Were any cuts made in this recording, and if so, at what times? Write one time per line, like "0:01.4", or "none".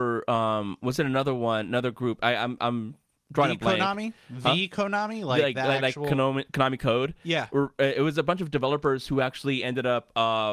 none